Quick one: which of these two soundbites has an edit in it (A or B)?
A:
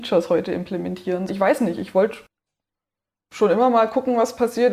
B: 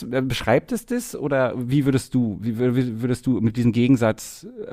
A